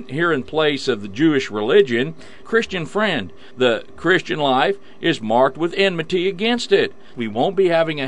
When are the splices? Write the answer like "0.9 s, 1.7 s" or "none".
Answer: 2.4 s, 7.1 s